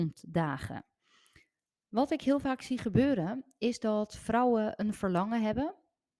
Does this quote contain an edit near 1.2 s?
no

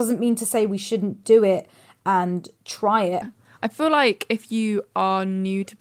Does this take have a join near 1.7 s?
no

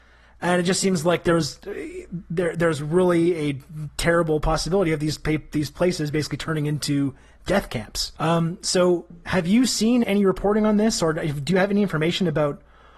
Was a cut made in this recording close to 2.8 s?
no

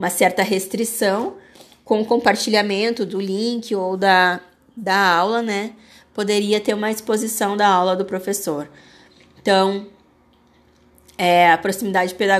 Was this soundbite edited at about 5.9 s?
no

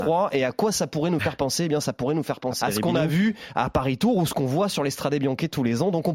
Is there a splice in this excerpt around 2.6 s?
yes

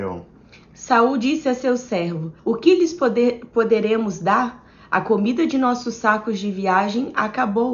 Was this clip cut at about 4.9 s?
no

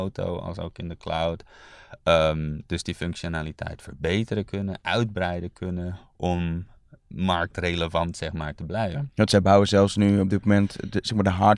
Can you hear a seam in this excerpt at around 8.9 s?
yes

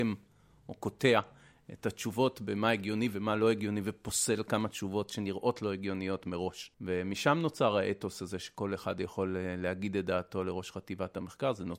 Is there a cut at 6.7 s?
yes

